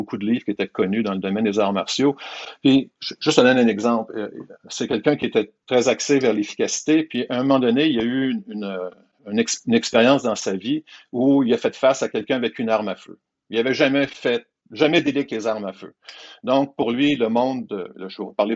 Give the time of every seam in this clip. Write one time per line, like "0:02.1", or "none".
0:04.6